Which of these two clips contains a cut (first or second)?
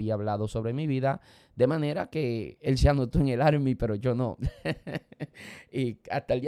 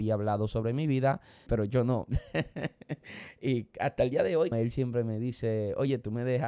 second